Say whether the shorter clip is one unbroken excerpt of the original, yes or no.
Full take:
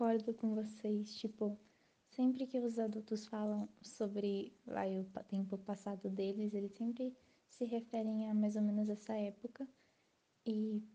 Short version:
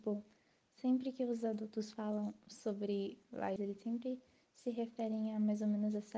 no